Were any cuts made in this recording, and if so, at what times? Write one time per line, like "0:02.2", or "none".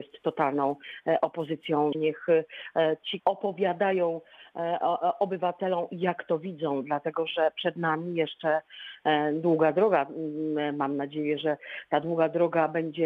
0:01.9
0:03.2